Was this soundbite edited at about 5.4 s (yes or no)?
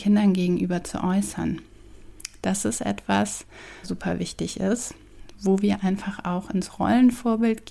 no